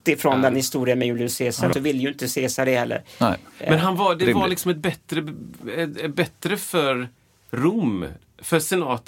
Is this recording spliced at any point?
yes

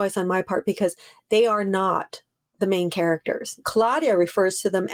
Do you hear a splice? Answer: yes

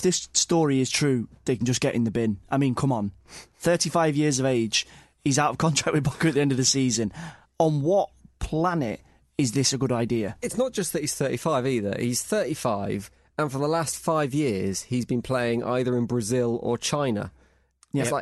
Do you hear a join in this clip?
no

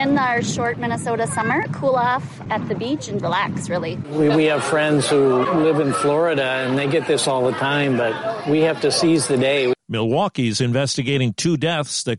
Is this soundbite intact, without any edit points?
no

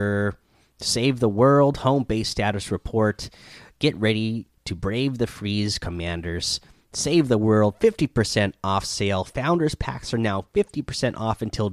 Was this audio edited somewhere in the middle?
no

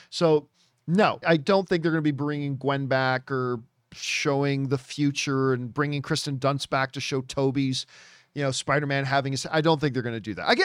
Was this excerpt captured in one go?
no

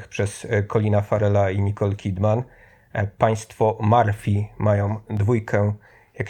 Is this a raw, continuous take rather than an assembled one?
yes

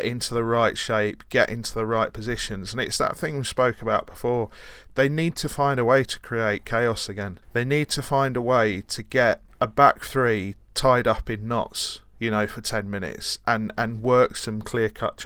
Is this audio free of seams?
yes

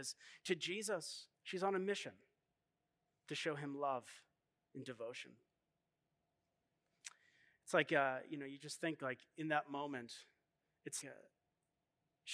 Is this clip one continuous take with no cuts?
no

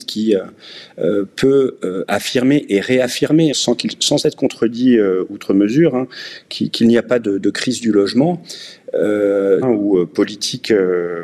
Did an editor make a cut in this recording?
yes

